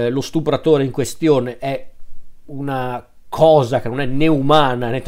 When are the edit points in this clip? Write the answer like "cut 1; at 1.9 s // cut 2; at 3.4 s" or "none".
none